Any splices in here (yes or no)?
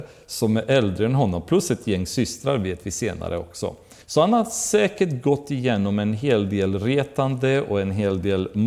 yes